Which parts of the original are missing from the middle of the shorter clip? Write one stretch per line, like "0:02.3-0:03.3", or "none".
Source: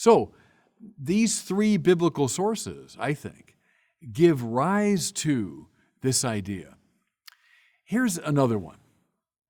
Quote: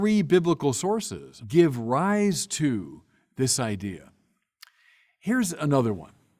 0:03.0-0:04.1